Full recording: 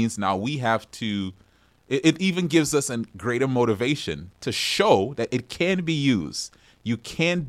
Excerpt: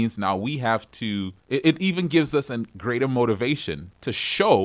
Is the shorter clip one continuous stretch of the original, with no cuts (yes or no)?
no